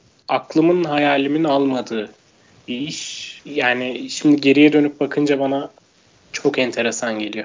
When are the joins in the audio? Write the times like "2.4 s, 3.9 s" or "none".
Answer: 3.4 s

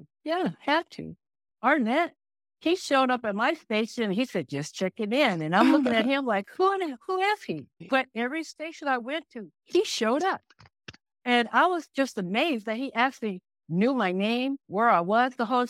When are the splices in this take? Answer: 1.5 s

